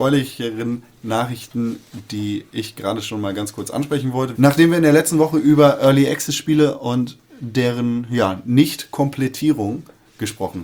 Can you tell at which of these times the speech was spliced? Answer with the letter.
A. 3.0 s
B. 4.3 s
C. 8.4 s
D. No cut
B